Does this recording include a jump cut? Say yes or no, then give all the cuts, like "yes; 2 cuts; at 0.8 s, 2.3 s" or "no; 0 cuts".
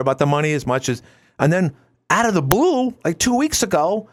no; 0 cuts